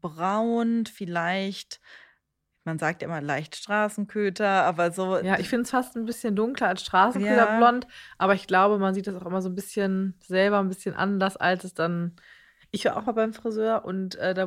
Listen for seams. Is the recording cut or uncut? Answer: uncut